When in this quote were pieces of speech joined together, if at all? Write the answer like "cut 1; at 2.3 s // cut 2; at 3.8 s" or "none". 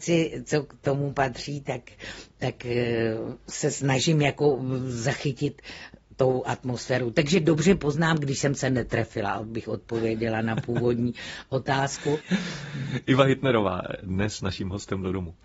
none